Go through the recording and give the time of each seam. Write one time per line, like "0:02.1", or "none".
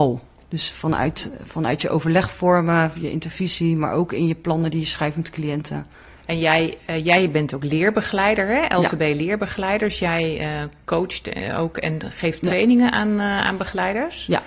none